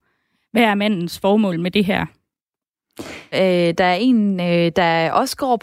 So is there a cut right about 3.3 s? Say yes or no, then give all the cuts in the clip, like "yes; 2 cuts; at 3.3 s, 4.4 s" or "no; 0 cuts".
yes; 1 cut; at 3.3 s